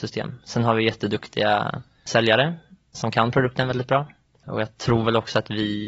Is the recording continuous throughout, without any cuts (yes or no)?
no